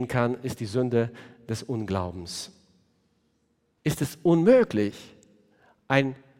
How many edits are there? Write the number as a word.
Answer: one